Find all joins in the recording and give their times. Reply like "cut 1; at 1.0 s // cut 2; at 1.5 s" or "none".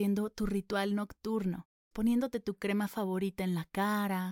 cut 1; at 1.9 s